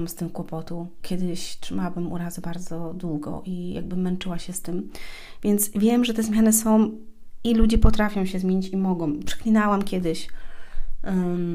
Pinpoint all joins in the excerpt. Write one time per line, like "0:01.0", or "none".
none